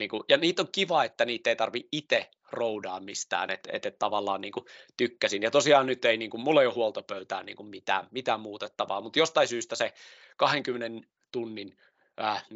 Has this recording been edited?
no; 0 cuts

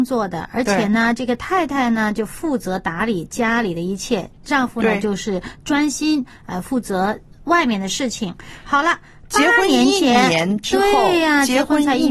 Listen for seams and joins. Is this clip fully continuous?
yes; 0 cuts

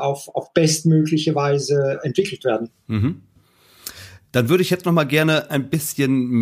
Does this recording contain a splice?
no; 0 cuts

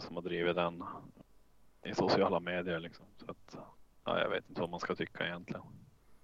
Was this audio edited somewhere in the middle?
no; 0 cuts

